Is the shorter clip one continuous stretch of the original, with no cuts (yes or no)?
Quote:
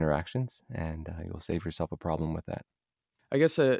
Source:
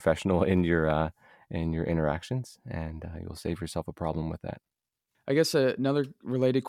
yes